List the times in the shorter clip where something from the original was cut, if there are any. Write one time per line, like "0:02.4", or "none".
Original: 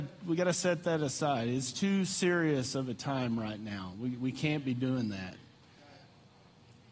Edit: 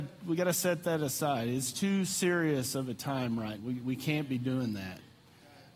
0:03.6